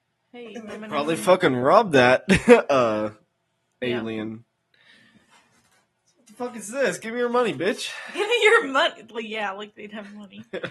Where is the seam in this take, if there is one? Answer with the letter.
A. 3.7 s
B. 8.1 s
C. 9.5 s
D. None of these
A